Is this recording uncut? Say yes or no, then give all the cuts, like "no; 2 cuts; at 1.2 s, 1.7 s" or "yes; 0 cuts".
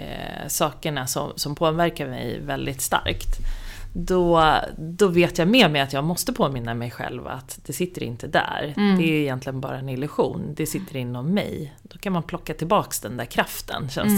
yes; 0 cuts